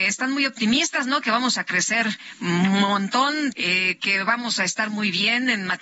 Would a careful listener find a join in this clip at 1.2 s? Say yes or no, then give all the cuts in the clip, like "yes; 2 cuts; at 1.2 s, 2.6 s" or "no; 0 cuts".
no; 1 cut; at 3.5 s